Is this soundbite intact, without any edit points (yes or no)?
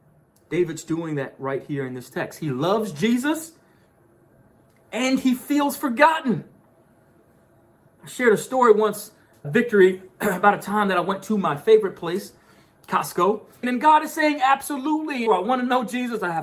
no